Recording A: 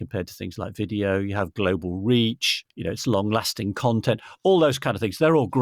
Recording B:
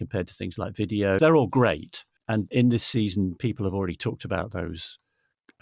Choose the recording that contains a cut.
B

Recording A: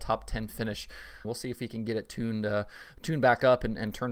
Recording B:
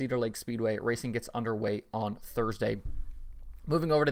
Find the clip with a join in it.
A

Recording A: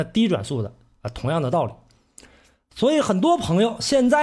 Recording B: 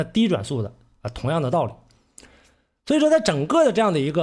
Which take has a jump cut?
A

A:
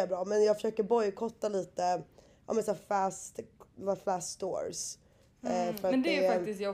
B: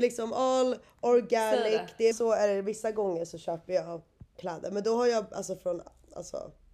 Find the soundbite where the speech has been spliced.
B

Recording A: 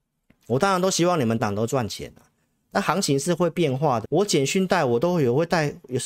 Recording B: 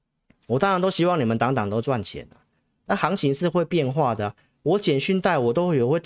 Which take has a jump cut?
A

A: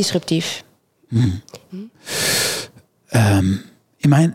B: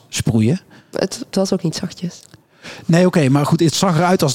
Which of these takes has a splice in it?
A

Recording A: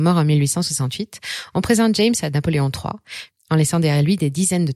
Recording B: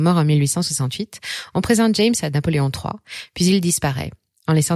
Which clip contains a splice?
A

